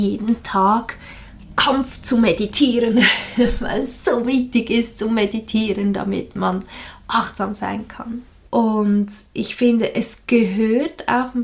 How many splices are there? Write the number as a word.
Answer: one